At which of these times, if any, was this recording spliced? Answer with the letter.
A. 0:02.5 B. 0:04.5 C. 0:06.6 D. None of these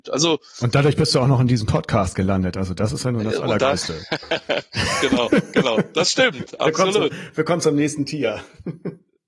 C